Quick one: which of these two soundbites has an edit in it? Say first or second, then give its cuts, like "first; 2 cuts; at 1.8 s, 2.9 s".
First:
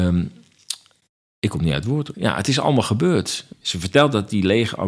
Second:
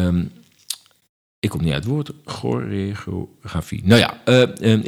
first; 2 cuts; at 2.1 s, 3.5 s